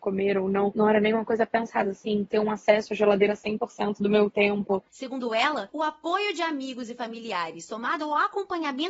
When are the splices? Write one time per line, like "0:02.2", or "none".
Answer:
0:01.8
0:04.9